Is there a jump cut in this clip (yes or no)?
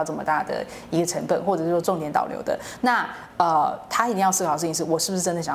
yes